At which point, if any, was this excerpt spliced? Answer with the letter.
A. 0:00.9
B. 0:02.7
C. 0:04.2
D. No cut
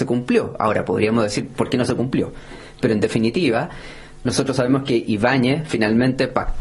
D